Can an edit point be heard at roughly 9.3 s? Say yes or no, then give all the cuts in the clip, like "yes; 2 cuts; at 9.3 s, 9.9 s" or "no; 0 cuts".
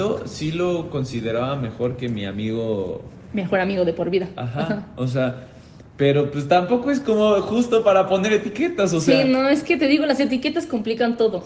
no; 0 cuts